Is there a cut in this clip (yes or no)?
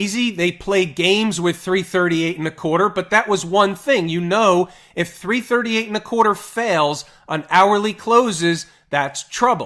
no